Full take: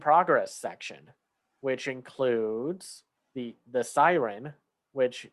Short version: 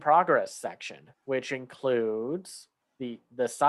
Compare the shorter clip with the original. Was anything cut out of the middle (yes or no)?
yes